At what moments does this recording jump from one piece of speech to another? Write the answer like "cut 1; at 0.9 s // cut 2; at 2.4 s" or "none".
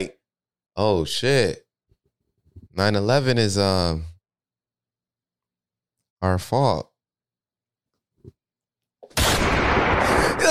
none